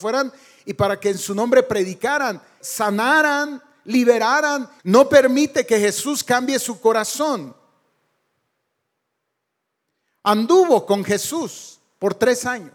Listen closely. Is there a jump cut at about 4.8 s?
yes; 2 cuts; at 2.6 s, 4.8 s

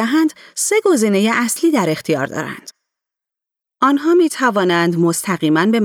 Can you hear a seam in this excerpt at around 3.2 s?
no; 0 cuts

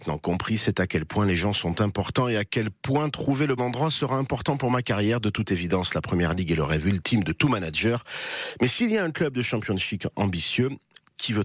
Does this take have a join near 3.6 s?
yes; 1 cut; at 3.6 s

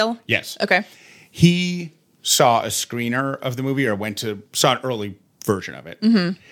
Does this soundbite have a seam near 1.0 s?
no; 1 cut; at 4.5 s

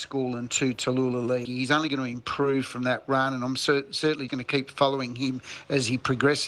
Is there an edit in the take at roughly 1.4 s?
yes; 2 cuts; at 1.4 s, 4.3 s

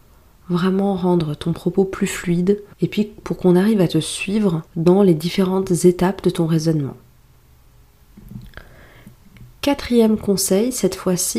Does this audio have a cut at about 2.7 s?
yes; 2 cuts; at 2.7 s, 4.7 s

